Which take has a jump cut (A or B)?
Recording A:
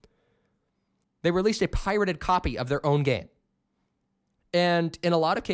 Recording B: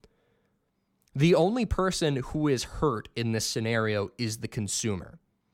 A